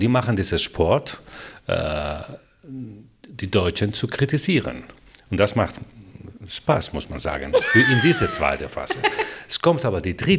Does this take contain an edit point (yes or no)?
no